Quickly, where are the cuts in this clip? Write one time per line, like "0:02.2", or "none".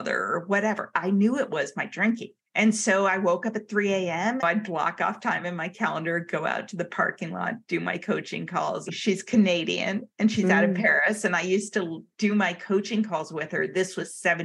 0:04.4
0:08.9